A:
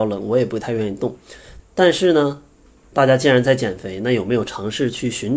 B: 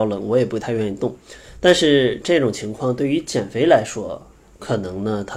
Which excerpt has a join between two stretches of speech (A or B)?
A